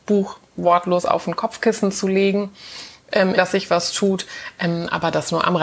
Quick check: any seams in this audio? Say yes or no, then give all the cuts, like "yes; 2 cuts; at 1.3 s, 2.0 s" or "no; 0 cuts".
yes; 1 cut; at 3.4 s